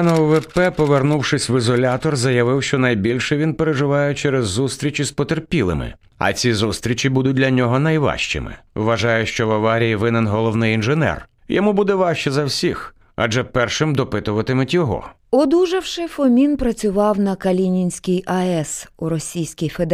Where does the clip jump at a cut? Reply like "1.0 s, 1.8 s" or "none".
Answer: 6.1 s, 15.2 s